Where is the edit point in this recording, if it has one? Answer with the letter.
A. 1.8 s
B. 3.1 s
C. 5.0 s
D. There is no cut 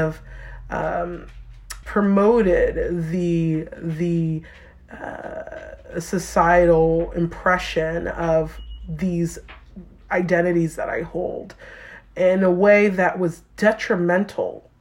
A